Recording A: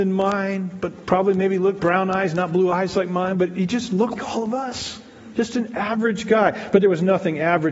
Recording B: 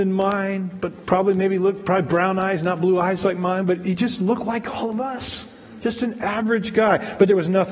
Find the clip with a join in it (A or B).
A